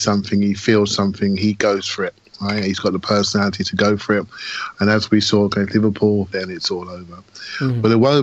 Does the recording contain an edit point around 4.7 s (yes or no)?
yes